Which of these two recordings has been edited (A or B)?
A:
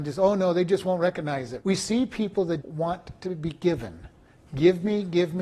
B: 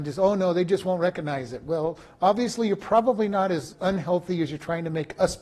A